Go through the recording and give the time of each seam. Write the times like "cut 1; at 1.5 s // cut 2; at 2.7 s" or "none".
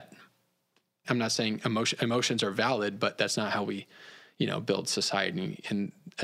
cut 1; at 1.0 s